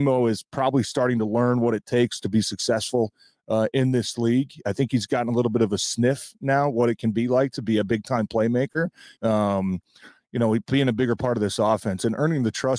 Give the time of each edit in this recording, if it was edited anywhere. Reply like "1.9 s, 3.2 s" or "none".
9.2 s